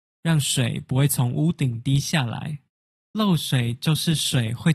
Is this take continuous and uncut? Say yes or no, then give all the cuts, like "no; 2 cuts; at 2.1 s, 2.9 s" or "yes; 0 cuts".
no; 1 cut; at 3.0 s